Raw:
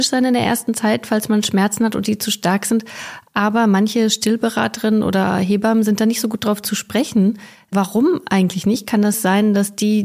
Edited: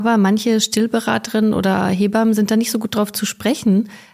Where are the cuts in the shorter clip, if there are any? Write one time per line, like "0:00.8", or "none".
none